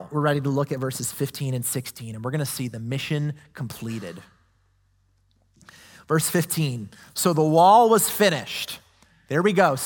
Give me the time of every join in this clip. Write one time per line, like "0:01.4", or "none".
none